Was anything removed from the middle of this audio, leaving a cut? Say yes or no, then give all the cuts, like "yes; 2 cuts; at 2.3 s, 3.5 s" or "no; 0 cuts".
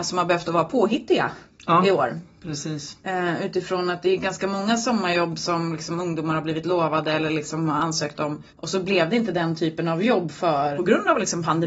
yes; 2 cuts; at 8.5 s, 10.8 s